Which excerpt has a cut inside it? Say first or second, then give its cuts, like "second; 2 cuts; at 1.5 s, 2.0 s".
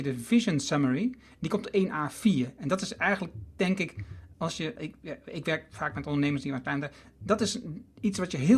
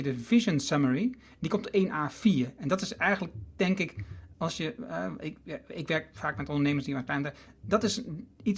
first; 1 cut; at 4.8 s